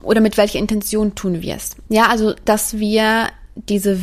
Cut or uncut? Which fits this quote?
cut